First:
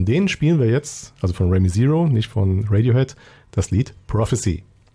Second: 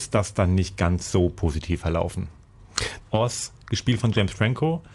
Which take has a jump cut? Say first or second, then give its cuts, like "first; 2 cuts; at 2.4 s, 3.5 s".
second; 1 cut; at 3.0 s